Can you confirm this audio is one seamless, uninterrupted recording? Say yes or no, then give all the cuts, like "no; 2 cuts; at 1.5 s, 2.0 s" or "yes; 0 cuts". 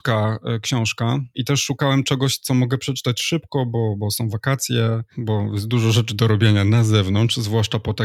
yes; 0 cuts